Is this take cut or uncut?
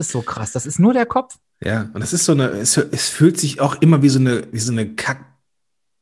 uncut